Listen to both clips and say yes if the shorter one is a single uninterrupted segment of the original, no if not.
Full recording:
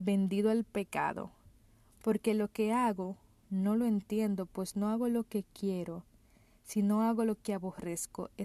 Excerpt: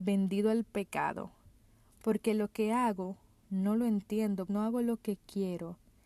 no